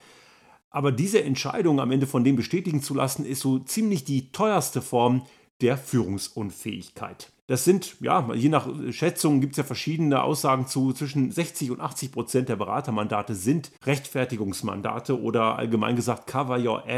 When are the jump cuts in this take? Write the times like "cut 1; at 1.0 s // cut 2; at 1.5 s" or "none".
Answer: cut 1; at 7.4 s // cut 2; at 13.8 s